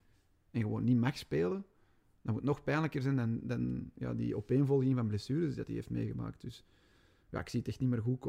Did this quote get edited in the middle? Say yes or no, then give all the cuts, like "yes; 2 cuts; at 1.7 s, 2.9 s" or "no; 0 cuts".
no; 0 cuts